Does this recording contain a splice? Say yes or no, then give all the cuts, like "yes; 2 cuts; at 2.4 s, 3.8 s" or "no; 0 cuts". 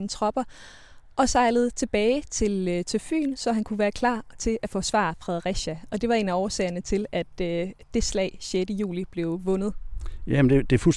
no; 0 cuts